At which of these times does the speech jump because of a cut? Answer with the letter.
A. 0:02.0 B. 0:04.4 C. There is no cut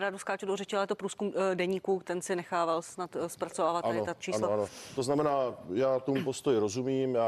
A